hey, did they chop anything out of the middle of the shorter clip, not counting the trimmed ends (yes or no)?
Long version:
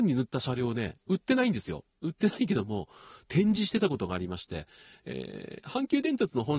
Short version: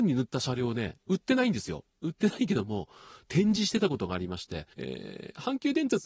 yes